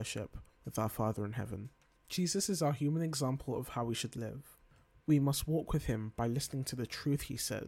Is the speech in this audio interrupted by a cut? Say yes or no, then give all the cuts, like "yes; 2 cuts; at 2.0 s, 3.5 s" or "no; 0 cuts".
yes; 2 cuts; at 2.0 s, 5.0 s